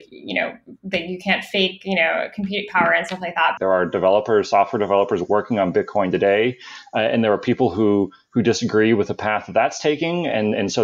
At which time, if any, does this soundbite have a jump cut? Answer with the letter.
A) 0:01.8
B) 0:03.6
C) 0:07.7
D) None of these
B